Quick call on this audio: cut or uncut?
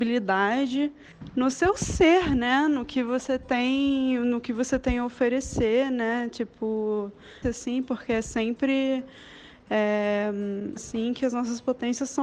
cut